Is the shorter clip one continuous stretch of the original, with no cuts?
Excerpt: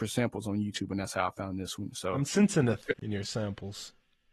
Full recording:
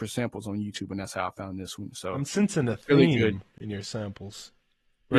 no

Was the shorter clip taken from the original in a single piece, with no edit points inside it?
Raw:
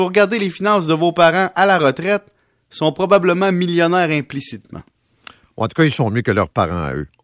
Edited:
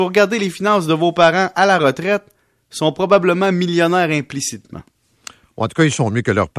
yes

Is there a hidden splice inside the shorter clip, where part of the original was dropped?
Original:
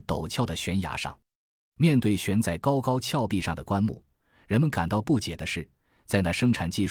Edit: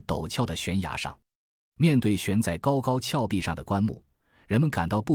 no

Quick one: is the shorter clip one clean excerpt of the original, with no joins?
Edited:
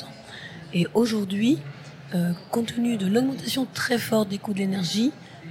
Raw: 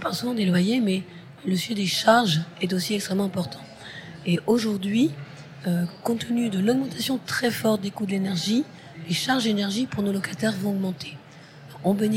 yes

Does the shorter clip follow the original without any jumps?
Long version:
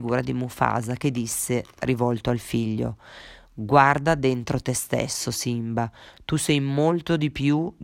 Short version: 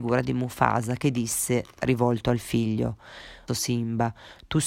no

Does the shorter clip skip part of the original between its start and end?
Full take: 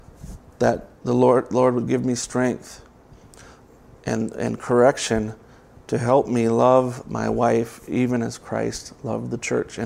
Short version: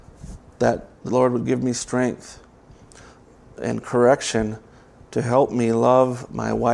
yes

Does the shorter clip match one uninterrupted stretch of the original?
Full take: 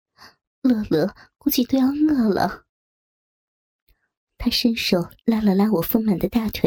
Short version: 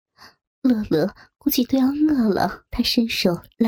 no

